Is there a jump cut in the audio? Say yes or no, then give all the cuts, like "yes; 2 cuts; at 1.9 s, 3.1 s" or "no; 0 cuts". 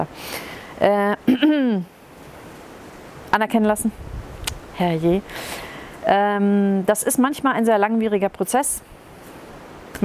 no; 0 cuts